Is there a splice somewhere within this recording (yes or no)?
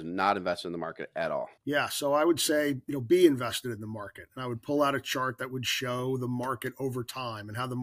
yes